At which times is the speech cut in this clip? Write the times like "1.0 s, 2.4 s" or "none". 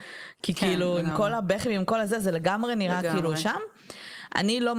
none